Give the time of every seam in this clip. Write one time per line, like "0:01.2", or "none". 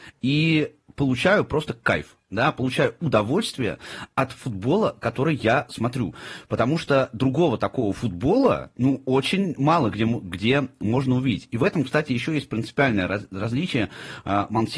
none

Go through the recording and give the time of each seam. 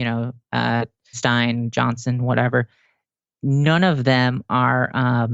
0:01.1

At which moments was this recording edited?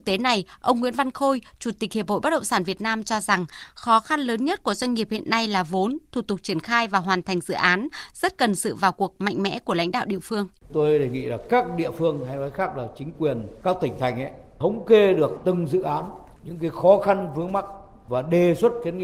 none

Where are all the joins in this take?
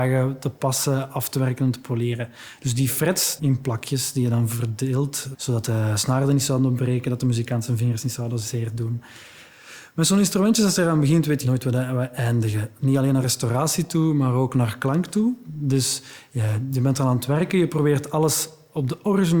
0:03.4
0:05.3

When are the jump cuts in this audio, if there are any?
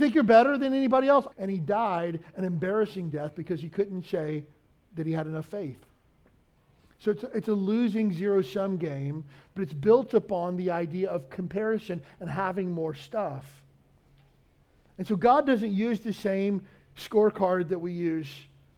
0:01.3

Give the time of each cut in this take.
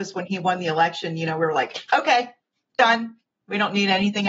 none

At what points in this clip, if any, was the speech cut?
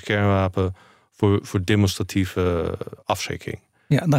0:03.0

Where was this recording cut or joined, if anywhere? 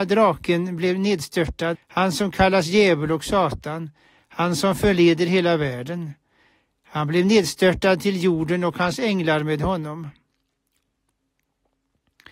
0:01.7

